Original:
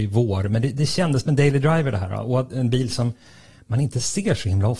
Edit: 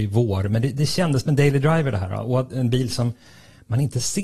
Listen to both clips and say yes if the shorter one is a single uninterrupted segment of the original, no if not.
yes